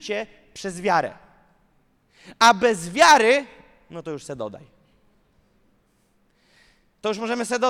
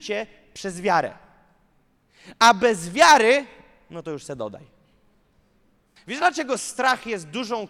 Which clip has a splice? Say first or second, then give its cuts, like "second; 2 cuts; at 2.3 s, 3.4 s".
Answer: second; 1 cut; at 6.0 s